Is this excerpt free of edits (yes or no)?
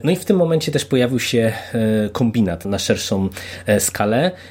no